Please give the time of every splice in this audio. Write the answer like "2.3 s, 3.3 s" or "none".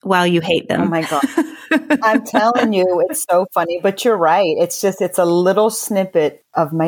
none